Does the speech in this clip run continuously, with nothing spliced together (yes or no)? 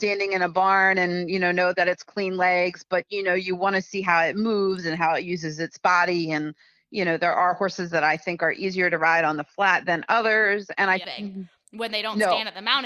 no